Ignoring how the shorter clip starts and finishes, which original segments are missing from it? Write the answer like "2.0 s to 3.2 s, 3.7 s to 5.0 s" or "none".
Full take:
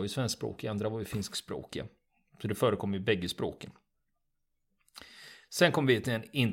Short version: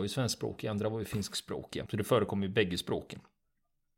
1.9 s to 2.4 s